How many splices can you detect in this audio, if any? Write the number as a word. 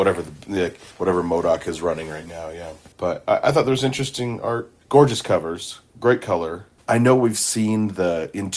zero